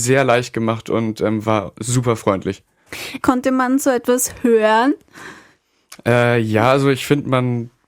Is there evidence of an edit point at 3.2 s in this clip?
yes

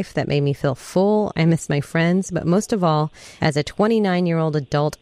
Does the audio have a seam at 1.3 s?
yes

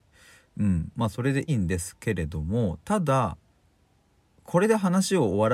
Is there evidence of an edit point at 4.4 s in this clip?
no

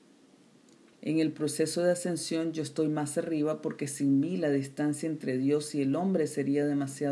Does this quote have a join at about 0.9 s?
yes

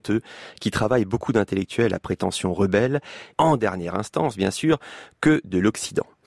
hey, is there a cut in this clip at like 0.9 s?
no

